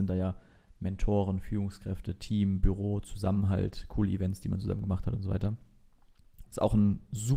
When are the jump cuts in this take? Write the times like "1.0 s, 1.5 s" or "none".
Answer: 6.5 s